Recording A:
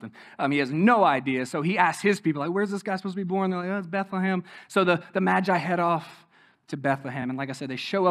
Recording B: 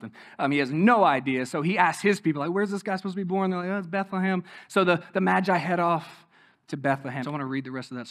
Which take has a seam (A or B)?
B